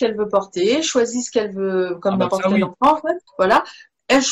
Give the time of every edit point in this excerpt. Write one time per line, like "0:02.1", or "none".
0:03.3